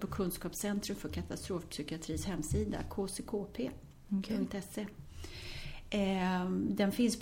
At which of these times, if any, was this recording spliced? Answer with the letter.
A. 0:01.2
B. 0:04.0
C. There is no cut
C